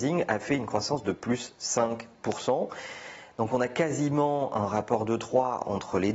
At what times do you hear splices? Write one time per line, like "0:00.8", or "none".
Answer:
none